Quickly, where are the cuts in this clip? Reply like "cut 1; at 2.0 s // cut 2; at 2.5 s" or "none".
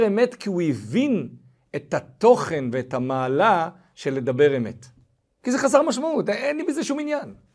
cut 1; at 5.3 s